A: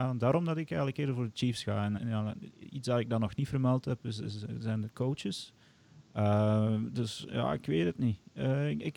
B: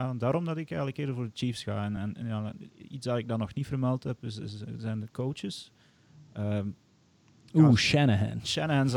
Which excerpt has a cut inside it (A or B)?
A